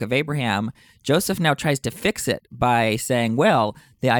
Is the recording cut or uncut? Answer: uncut